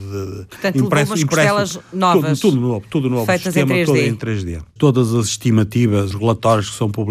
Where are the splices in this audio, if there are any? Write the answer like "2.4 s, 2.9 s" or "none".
4.8 s